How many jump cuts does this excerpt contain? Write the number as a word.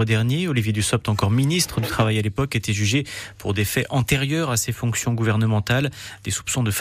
zero